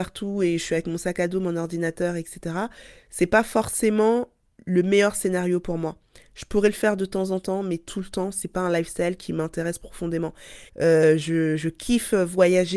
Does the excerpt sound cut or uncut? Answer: cut